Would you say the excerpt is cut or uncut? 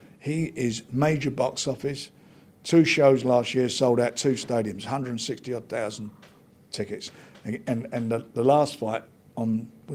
uncut